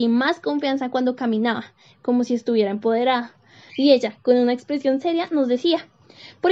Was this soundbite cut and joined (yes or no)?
yes